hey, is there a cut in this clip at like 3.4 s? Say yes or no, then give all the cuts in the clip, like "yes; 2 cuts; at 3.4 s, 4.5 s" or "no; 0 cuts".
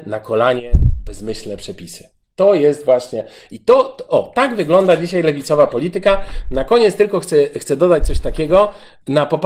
no; 0 cuts